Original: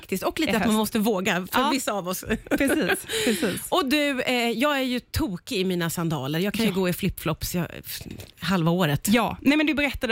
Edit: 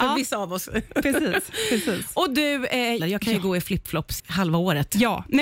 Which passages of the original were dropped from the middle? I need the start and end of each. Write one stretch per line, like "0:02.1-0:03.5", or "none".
0:04.5-0:06.3
0:07.5-0:08.3